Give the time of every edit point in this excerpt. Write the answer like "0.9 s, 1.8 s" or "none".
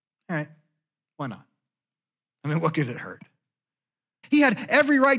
4.2 s